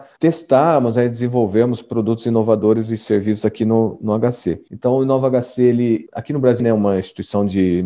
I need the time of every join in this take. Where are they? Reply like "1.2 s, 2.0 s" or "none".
4.7 s, 6.6 s